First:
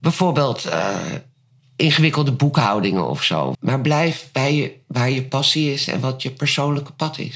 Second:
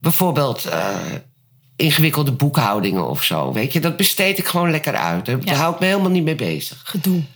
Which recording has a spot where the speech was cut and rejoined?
first; 1 cut; at 3.5 s

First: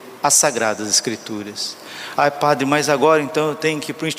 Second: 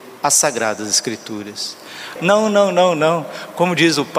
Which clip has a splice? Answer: second; 1 cut; at 2.2 s

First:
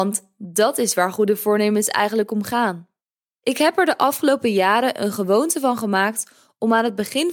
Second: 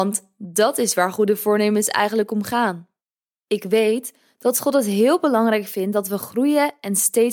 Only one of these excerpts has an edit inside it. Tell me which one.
second; 1 cut; at 3.3 s

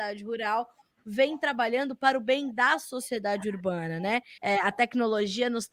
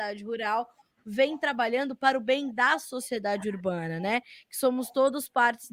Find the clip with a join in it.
first; 1 cut; at 4.4 s

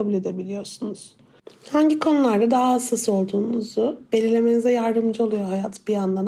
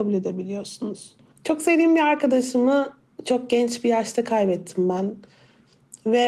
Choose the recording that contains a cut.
second; 1 cut; at 1.3 s

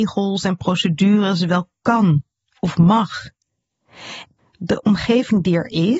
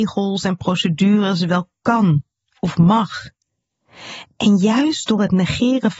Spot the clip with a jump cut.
first; 1 cut; at 4.4 s

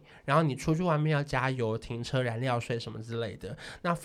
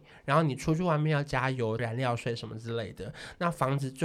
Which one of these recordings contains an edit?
second; 1 cut; at 1.8 s

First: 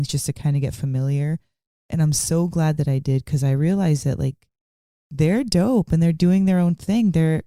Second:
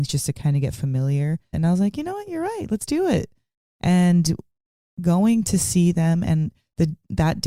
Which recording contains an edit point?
second; 1 cut; at 1.5 s

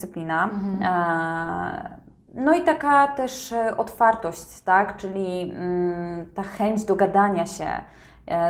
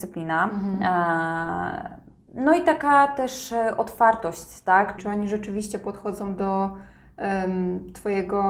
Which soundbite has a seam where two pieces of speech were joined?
second; 1 cut; at 5.0 s

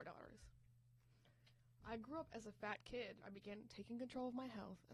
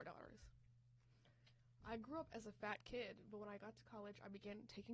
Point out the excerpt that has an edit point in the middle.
first; 1 cut; at 3.2 s

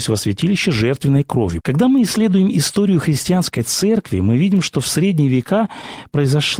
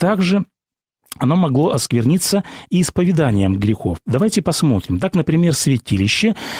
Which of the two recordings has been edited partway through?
first; 1 cut; at 1.6 s

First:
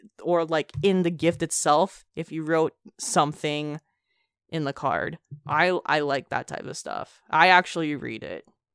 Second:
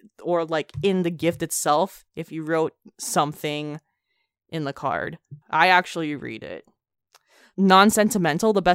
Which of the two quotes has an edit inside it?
second; 1 cut; at 5.4 s

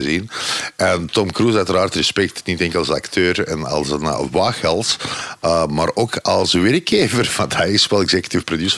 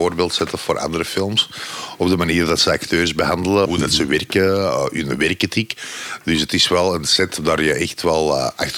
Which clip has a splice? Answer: second; 1 cut; at 3.6 s

